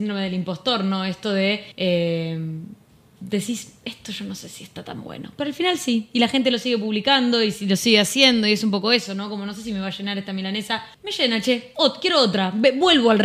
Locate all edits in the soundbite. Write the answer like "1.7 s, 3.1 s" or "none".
1.7 s